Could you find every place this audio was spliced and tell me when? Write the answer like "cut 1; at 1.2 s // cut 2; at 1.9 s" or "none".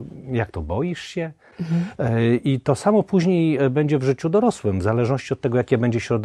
none

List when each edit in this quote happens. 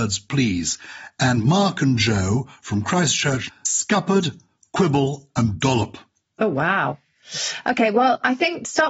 cut 1; at 3.5 s

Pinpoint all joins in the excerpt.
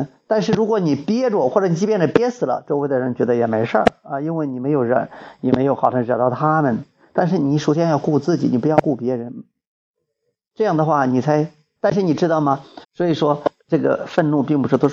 cut 1; at 11.8 s // cut 2; at 12.8 s

